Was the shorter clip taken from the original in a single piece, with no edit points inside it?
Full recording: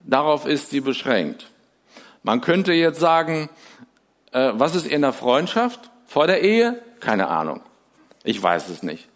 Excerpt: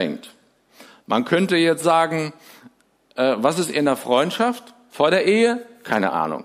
yes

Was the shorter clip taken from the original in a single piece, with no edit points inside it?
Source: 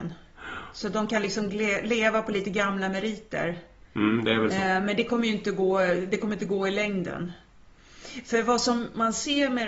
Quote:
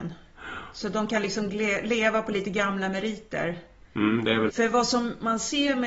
no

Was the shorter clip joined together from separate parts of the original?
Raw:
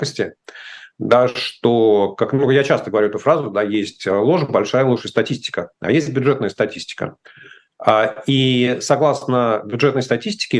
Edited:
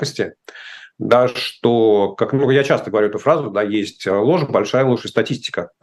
no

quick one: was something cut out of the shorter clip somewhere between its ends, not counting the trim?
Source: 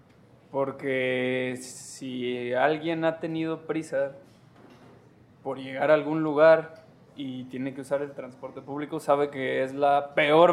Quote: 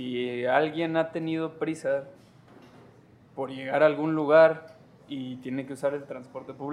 no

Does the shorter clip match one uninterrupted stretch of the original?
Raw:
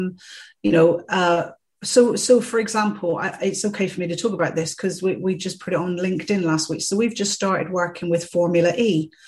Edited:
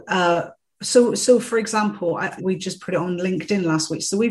no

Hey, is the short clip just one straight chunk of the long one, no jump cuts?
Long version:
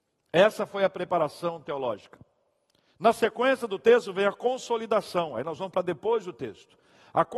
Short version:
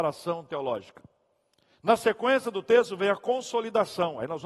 yes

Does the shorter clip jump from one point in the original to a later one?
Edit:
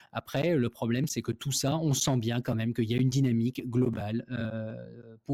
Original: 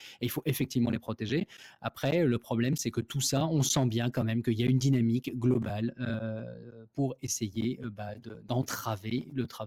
no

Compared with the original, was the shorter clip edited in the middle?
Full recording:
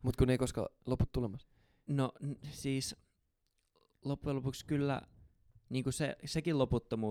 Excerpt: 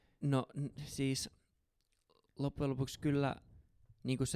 no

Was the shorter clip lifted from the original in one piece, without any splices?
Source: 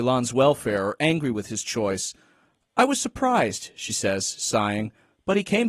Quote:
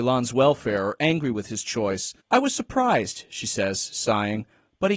no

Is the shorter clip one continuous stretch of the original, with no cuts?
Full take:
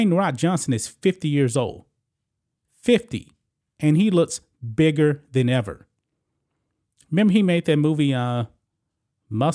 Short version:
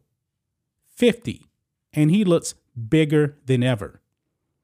yes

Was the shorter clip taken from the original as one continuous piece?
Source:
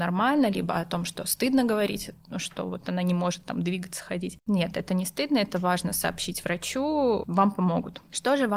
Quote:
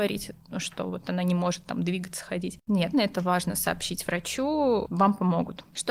no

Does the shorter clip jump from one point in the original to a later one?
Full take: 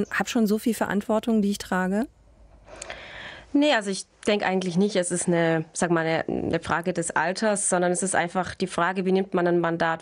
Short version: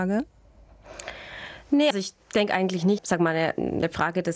yes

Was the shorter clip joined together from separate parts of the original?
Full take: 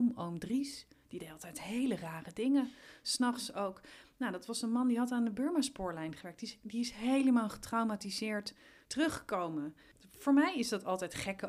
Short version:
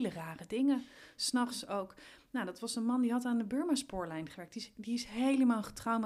no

